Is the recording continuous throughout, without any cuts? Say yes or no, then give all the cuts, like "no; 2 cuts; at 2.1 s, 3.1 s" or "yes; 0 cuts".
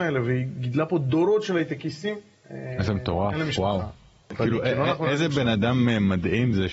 yes; 0 cuts